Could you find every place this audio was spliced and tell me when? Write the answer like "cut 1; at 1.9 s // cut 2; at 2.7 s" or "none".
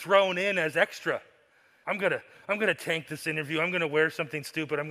cut 1; at 1.8 s